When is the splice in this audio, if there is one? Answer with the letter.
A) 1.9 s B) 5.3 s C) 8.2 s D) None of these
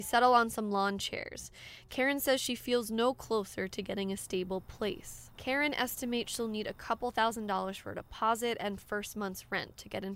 B